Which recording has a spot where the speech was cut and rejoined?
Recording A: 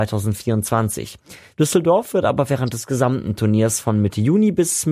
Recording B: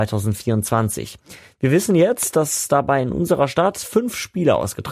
A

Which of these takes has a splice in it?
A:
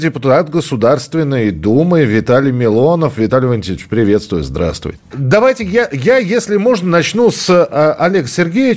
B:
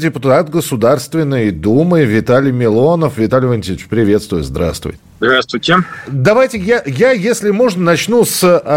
A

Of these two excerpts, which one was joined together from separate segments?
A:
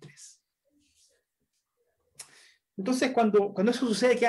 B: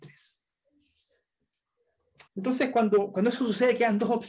B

